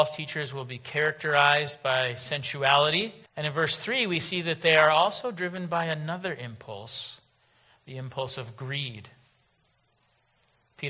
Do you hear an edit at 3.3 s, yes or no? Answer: yes